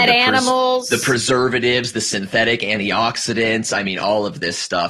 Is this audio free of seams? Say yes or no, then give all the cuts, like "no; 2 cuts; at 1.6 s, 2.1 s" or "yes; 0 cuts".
yes; 0 cuts